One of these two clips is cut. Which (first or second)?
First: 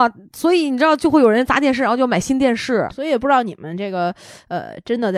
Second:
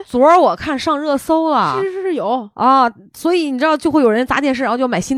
first